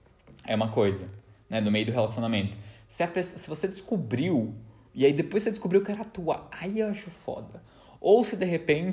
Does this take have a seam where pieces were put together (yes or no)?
no